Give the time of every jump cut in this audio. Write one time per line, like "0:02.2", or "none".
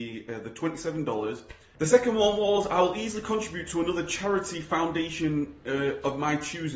0:01.7